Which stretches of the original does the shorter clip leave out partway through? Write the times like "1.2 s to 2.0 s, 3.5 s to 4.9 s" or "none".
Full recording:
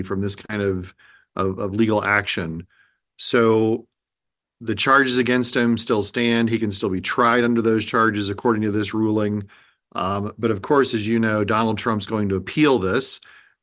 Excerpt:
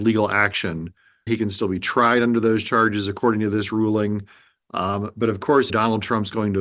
3.0 s to 6.5 s, 10.9 s to 11.5 s